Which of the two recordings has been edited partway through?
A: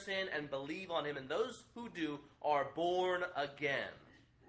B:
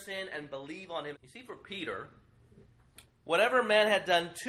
B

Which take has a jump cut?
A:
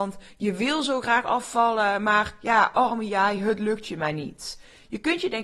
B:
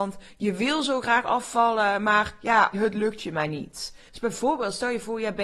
B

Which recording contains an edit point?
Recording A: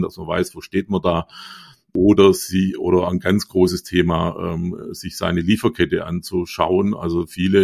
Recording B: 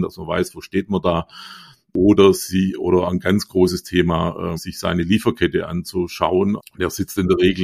B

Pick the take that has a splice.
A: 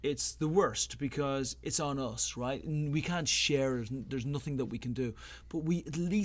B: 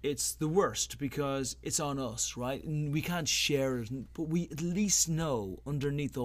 B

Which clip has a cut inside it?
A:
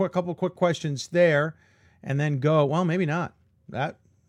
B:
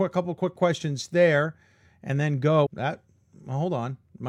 B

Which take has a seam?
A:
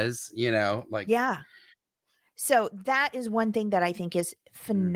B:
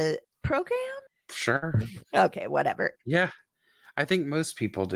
B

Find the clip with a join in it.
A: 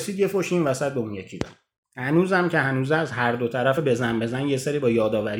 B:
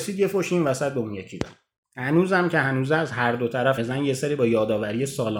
B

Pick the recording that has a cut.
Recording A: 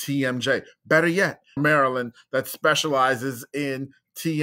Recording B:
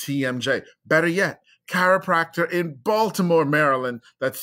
A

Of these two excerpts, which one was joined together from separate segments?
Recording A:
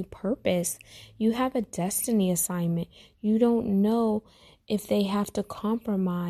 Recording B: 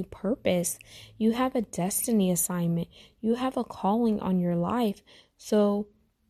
A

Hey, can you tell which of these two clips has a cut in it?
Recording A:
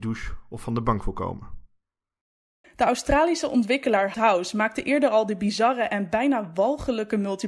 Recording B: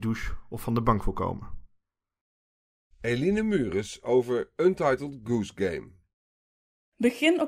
A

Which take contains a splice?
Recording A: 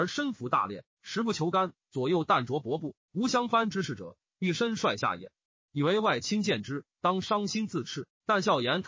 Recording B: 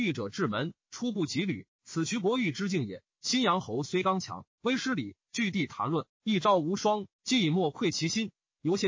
B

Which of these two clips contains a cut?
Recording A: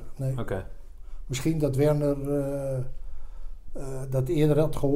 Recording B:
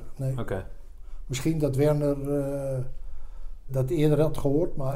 B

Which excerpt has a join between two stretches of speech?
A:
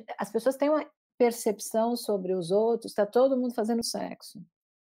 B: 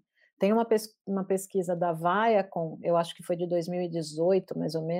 A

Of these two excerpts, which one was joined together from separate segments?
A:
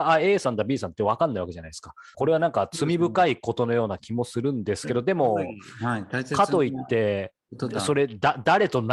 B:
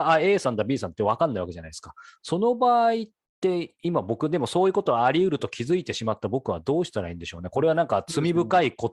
A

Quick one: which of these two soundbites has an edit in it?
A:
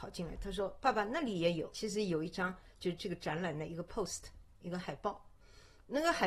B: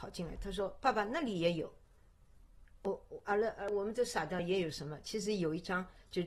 A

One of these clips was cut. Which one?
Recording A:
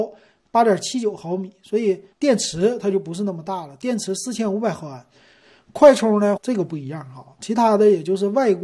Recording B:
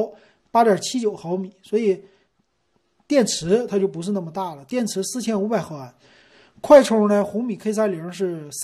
A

